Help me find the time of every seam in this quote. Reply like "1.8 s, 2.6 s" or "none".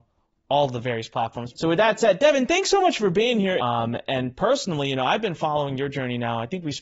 1.5 s, 3.6 s